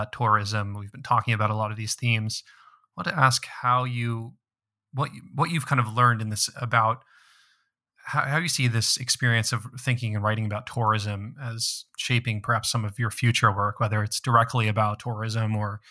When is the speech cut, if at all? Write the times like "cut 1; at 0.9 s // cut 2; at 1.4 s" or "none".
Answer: cut 1; at 6.5 s